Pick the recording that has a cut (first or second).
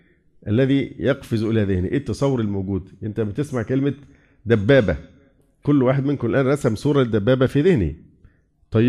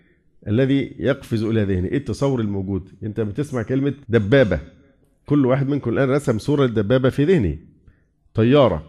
second